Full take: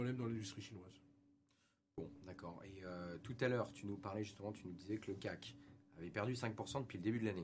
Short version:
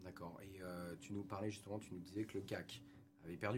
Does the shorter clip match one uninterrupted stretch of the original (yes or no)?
no